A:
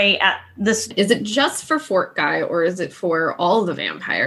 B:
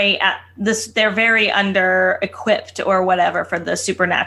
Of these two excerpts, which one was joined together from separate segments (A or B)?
A